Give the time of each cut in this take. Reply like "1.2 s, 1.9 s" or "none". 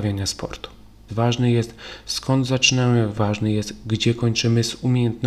1.1 s, 3.1 s